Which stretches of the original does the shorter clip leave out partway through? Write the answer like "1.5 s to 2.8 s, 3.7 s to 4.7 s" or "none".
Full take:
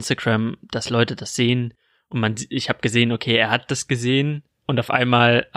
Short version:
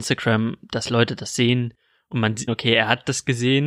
2.5 s to 3.1 s